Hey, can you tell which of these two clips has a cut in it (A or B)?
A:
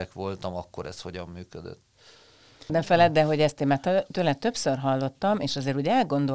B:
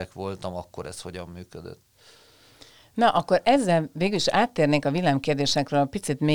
A